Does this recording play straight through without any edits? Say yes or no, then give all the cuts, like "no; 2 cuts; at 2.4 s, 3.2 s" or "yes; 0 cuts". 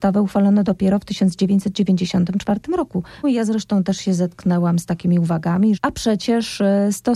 no; 2 cuts; at 3.2 s, 5.8 s